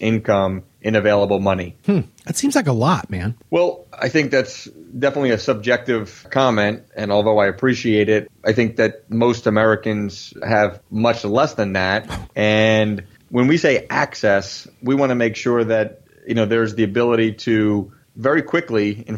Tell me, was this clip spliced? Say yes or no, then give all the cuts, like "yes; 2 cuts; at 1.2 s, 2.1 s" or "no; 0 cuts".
yes; 1 cut; at 12.3 s